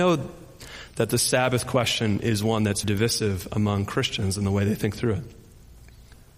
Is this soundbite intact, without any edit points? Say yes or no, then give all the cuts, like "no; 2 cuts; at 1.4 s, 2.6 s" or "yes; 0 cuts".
no; 1 cut; at 2.8 s